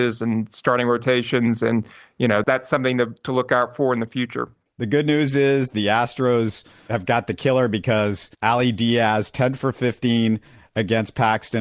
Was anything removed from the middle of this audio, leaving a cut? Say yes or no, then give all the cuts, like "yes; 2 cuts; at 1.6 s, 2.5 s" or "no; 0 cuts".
yes; 2 cuts; at 2.4 s, 8.3 s